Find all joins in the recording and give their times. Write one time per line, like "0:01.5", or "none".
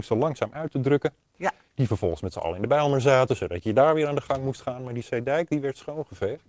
none